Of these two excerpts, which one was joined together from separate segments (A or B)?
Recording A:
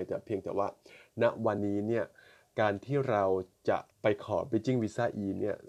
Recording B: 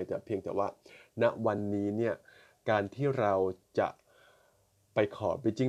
A